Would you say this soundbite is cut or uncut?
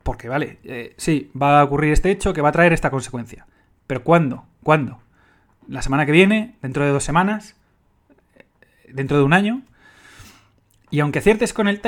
uncut